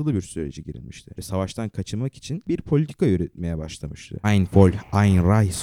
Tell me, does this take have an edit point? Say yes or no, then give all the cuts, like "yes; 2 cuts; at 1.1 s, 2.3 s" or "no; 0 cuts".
yes; 2 cuts; at 1.1 s, 4.2 s